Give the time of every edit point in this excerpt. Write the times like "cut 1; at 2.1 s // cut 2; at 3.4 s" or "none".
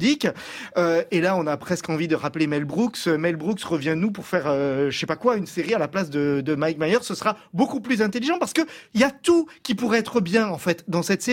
none